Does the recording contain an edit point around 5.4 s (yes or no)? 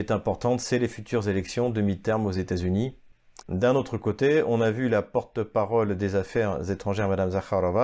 no